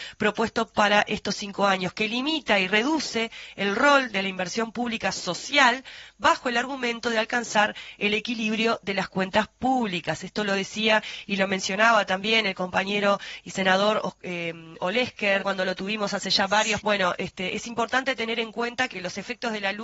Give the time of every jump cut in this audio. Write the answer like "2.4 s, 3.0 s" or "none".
15.4 s, 16.8 s, 18.9 s